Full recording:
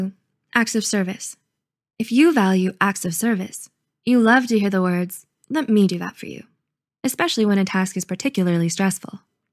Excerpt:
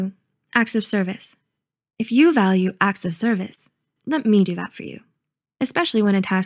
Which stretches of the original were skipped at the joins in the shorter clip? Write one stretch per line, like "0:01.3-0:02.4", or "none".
0:04.0-0:05.4